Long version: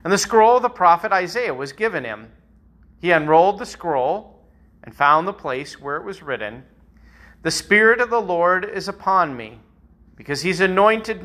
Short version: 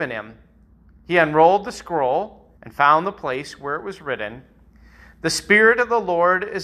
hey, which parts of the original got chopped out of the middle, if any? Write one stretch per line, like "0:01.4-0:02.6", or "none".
0:04.5-0:04.8